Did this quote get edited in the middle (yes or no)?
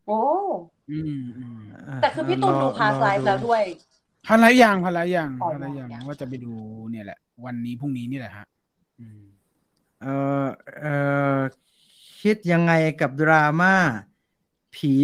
yes